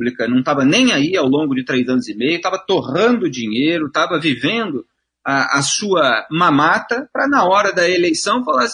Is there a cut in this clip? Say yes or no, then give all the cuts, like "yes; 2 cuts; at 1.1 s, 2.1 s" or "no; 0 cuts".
no; 0 cuts